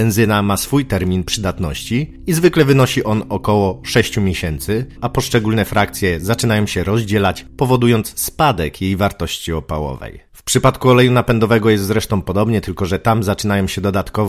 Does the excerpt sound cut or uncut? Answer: cut